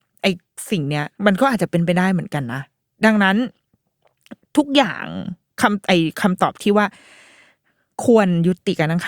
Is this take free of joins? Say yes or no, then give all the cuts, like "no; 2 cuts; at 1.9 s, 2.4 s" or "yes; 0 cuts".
no; 1 cut; at 1.1 s